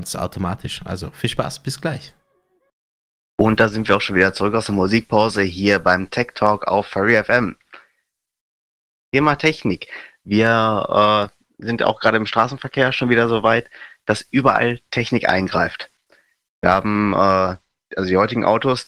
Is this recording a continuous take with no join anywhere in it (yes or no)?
yes